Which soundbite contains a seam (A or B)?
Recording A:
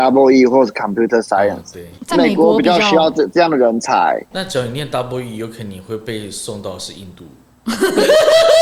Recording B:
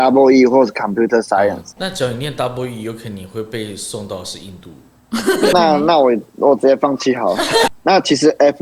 B